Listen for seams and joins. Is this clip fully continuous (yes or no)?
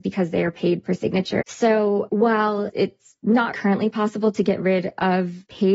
no